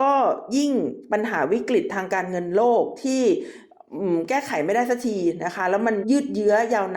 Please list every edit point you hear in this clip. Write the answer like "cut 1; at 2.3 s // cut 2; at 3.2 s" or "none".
cut 1; at 6.0 s